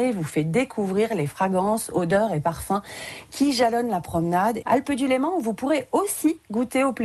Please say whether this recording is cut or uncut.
cut